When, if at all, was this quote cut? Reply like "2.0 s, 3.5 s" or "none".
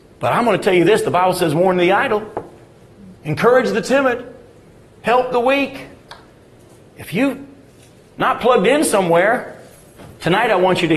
3.2 s

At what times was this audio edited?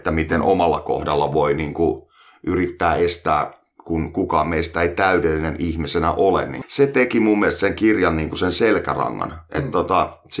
6.6 s

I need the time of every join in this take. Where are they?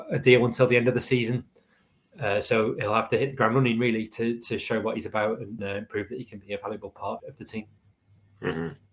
5.6 s, 7.2 s

